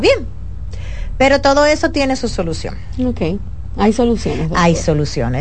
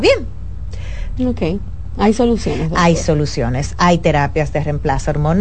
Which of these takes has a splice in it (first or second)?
second